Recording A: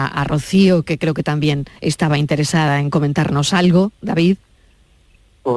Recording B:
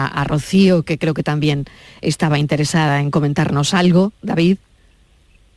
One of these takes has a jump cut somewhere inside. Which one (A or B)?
A